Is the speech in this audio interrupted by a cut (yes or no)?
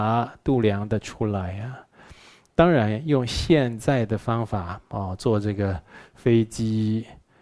no